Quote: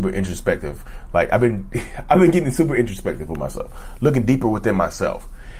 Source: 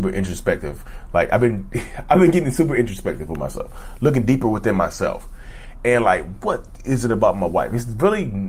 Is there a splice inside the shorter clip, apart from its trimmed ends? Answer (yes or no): no